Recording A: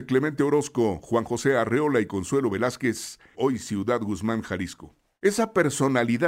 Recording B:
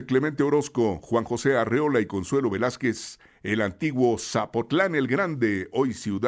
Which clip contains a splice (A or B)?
A